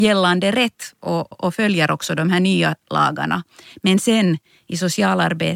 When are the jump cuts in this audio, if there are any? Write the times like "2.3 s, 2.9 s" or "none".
1.3 s